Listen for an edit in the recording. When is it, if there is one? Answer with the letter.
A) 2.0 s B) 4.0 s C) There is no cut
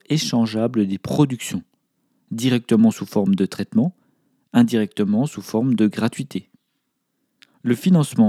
C